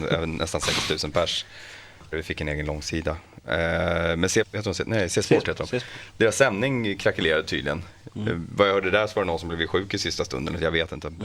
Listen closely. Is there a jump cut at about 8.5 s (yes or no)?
no